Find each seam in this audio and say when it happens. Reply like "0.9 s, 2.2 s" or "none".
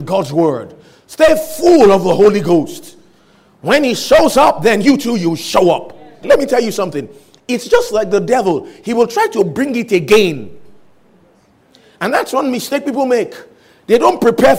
6.2 s